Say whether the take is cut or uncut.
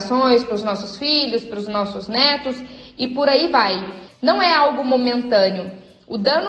cut